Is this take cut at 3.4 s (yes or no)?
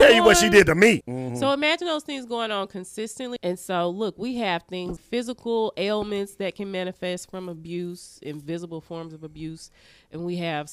yes